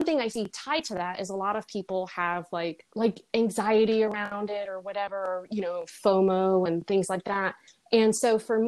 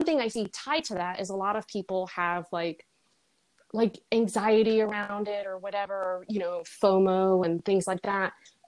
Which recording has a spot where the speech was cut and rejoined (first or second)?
first